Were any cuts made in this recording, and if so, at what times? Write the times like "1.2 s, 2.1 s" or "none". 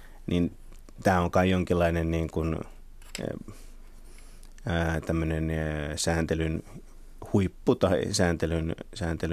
none